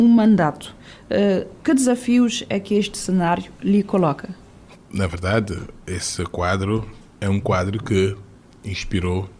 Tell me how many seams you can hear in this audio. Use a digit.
0